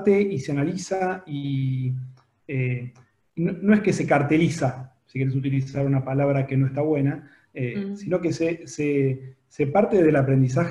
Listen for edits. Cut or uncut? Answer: uncut